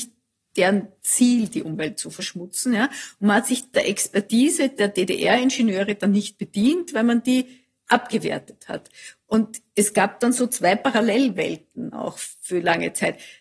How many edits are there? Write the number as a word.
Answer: one